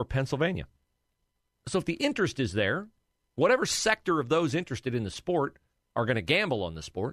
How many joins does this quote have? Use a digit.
1